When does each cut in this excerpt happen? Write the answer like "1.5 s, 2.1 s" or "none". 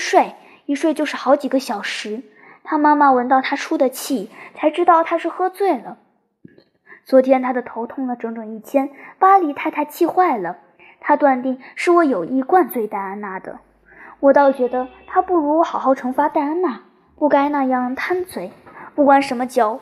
none